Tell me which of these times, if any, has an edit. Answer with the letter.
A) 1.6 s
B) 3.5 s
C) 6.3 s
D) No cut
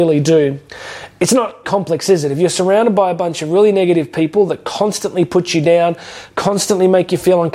A